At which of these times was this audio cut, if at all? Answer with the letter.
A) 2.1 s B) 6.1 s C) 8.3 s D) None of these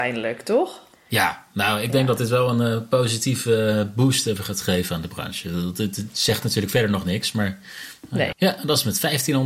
C